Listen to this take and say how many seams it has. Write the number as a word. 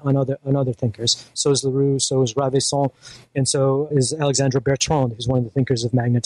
two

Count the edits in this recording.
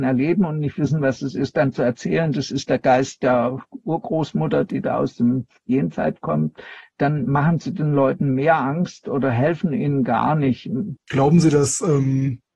one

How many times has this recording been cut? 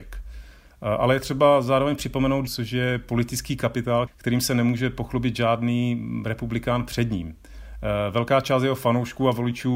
two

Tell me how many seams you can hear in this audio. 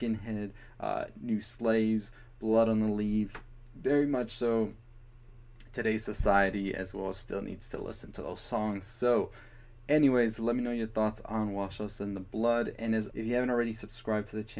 one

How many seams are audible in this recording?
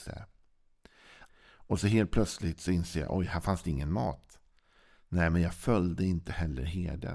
one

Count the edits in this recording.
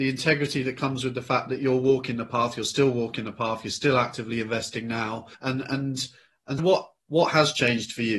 two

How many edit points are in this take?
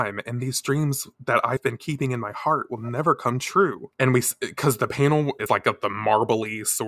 two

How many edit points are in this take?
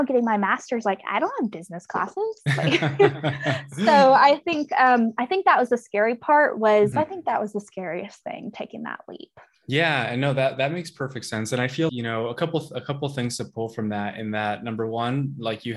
two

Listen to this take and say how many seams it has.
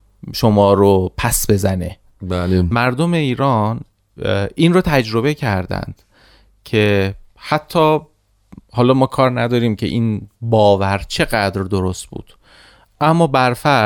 zero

